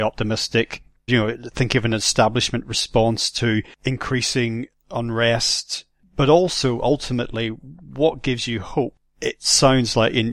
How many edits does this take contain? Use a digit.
1